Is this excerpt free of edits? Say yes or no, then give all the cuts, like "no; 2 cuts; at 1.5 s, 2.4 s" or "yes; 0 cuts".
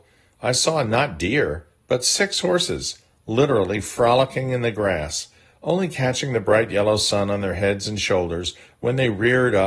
yes; 0 cuts